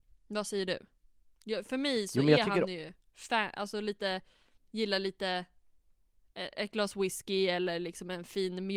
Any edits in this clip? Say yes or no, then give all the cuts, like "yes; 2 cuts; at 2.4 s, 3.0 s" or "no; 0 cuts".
yes; 2 cuts; at 4.6 s, 6.5 s